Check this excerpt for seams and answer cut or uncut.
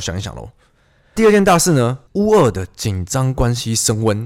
uncut